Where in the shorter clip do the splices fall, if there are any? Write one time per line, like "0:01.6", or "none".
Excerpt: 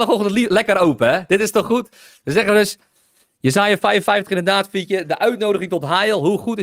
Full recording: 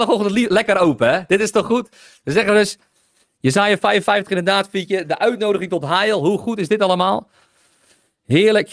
none

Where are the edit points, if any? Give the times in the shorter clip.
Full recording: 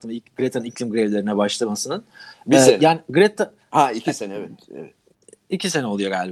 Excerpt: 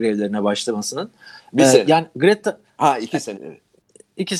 0:03.4

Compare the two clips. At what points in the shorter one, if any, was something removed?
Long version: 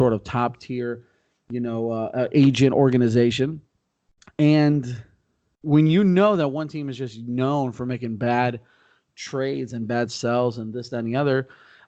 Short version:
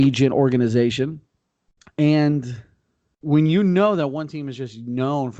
none

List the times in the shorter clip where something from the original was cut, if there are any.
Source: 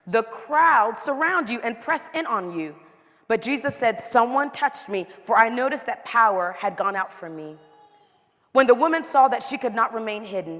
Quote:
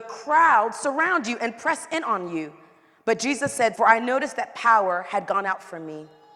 0:03.7

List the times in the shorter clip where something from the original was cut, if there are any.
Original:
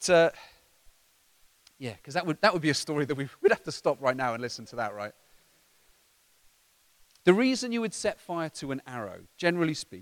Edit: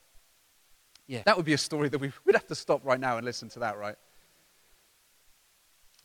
0:01.2

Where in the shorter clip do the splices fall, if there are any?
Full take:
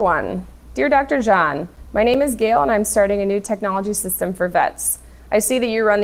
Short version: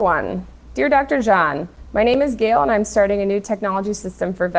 none

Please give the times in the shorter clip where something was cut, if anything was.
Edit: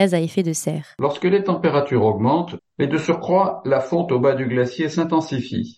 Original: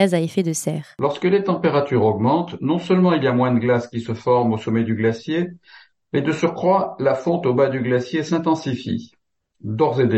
0:02.6

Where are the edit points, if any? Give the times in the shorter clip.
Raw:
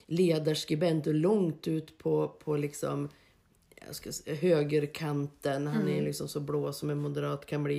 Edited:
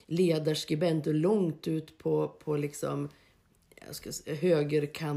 none

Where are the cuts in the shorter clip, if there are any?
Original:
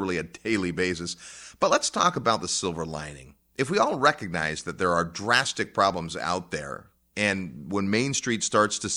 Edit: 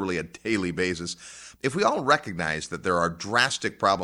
0:01.5

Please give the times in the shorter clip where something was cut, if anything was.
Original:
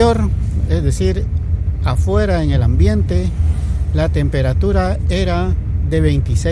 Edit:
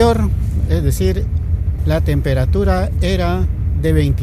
0:01.8

